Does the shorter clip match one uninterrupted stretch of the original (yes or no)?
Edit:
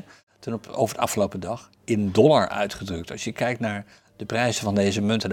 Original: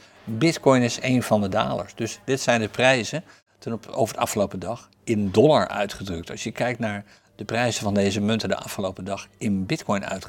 yes